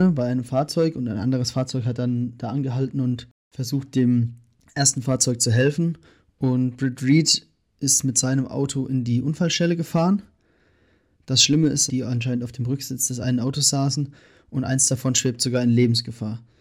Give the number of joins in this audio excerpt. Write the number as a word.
one